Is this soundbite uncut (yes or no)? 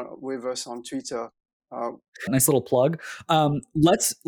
no